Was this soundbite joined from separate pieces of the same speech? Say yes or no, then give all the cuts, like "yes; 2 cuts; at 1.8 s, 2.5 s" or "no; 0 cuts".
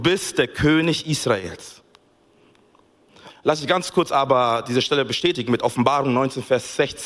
yes; 1 cut; at 3.3 s